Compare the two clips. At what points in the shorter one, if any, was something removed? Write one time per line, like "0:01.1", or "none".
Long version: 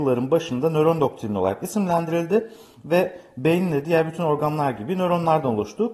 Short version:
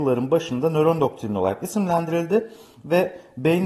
none